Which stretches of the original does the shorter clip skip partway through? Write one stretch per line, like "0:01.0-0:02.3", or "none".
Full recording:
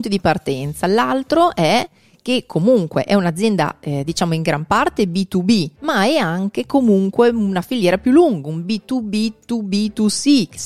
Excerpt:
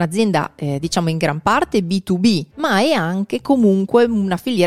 none